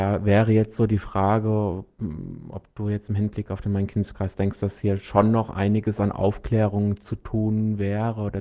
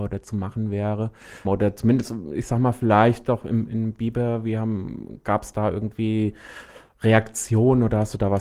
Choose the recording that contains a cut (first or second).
second